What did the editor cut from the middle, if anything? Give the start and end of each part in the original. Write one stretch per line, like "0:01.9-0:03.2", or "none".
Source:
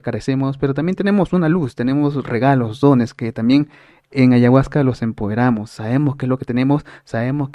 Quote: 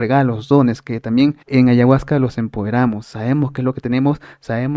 0:03.7-0:04.1